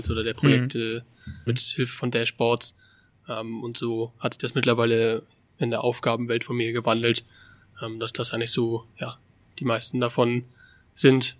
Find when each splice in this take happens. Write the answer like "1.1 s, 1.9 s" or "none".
1.5 s

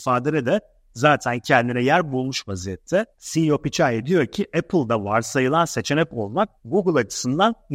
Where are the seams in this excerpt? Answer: 3.1 s, 6.6 s

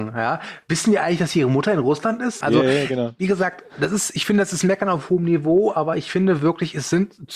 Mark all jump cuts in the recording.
2.4 s

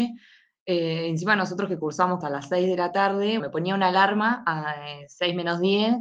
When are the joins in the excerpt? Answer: 2.2 s, 3.4 s

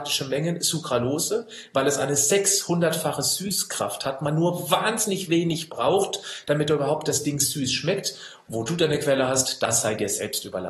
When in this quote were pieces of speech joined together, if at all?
8.4 s

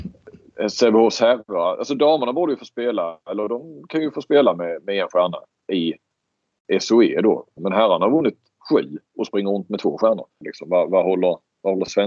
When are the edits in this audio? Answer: 7.6 s, 9.1 s, 10.4 s

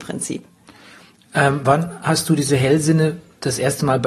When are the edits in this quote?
none

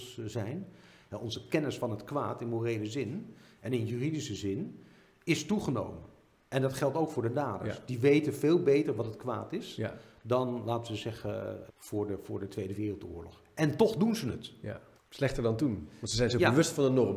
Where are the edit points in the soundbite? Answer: 1.1 s, 11.7 s, 15.0 s

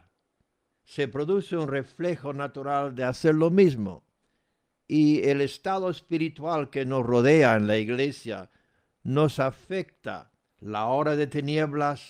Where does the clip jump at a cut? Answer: 10.5 s

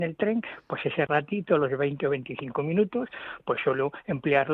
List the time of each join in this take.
none

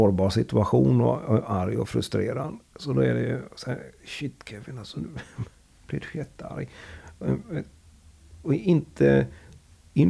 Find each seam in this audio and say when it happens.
none

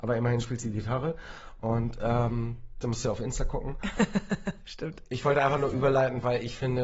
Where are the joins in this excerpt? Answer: 2.8 s

